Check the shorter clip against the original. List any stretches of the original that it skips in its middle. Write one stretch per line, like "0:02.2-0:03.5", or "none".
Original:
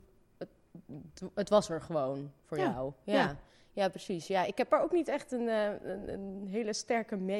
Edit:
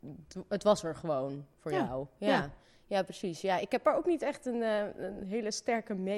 0:06.1-0:06.4